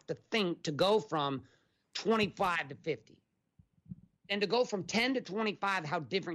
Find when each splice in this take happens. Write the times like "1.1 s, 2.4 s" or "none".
4.2 s